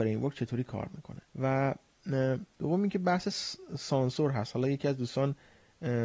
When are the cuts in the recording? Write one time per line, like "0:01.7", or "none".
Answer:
0:01.3
0:02.5